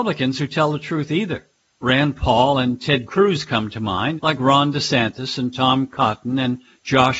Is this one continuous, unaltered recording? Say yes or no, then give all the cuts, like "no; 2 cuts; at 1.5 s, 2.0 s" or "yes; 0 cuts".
no; 1 cut; at 4.2 s